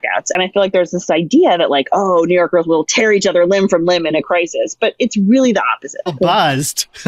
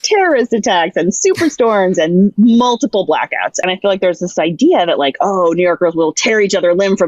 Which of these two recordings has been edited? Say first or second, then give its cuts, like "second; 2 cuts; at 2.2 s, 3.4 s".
first; 1 cut; at 6.1 s